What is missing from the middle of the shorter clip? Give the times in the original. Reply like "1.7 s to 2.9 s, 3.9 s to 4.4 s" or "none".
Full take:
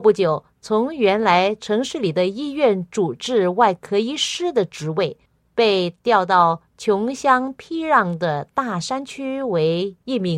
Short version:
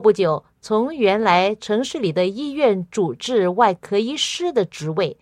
none

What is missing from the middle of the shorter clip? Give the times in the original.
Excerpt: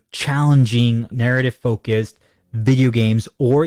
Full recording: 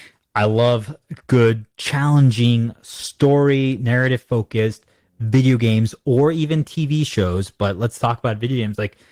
2.8 s to 3.8 s

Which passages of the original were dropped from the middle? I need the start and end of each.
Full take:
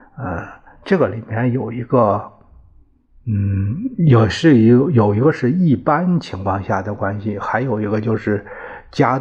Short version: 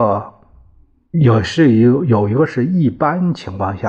3.1 s to 4.0 s

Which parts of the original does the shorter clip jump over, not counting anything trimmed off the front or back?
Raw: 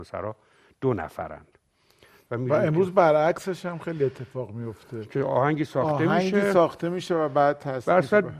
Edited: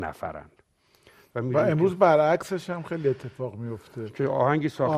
none

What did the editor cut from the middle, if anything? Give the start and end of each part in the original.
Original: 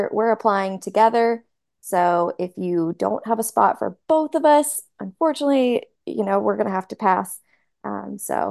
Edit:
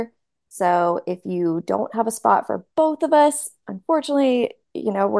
none

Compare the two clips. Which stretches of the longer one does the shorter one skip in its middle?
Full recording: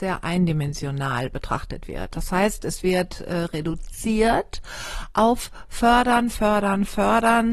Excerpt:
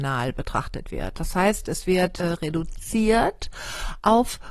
3.2 s to 3.3 s

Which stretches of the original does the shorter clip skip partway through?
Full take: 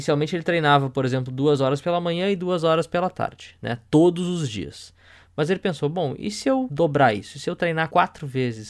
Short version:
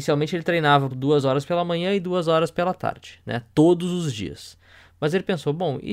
0.9 s to 1.3 s

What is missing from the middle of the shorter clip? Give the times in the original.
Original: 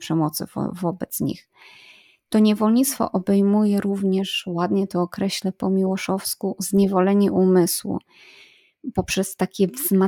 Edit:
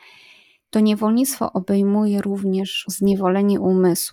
4.4 s to 6.6 s

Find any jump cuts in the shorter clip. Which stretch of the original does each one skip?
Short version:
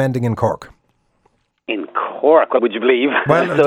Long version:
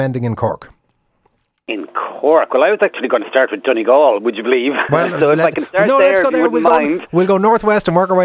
2.6 s to 4.2 s

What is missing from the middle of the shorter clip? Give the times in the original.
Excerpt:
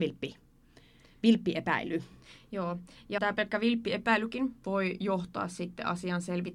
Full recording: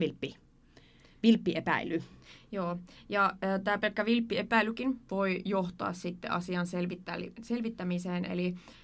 3.2 s to 3.6 s

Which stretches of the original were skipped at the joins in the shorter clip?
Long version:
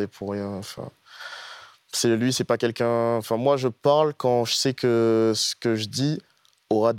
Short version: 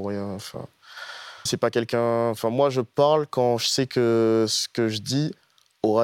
1.7 s to 2.3 s

